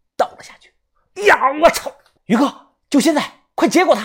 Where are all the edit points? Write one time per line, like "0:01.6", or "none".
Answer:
0:02.2